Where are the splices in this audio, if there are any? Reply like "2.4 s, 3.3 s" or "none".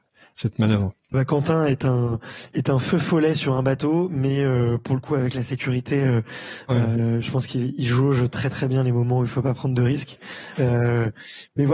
1.1 s, 10.6 s